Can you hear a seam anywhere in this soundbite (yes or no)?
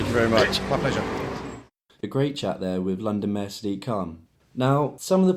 no